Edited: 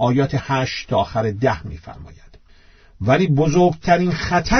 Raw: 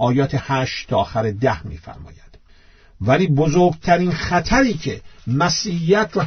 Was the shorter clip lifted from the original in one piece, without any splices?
yes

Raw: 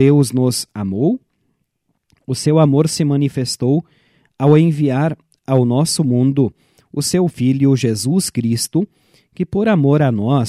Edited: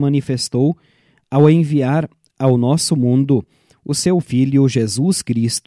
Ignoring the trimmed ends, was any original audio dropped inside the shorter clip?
no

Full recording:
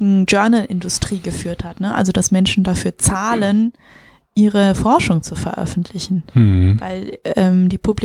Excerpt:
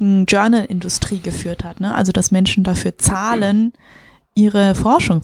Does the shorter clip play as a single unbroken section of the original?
yes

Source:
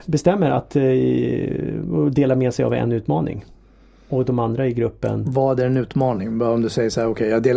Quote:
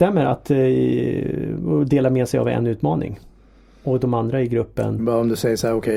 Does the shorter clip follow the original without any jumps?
no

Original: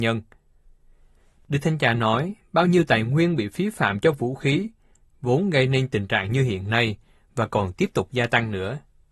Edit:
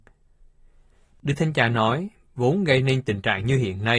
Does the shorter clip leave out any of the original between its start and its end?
yes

